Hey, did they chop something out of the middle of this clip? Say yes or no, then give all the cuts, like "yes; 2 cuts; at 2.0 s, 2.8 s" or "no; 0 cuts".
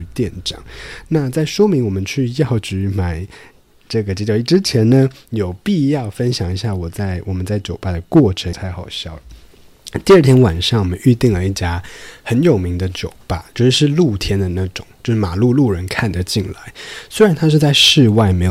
yes; 1 cut; at 8.5 s